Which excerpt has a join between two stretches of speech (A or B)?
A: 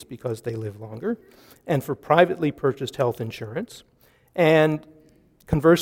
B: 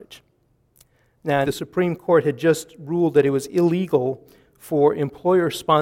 B